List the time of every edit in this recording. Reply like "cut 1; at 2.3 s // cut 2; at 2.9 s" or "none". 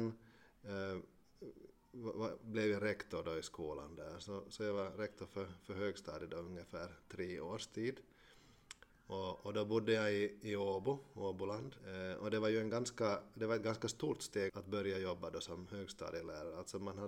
cut 1; at 8.9 s // cut 2; at 11.8 s // cut 3; at 14.5 s